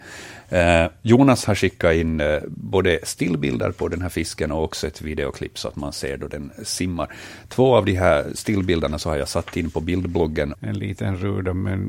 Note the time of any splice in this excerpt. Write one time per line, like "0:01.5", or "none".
0:10.5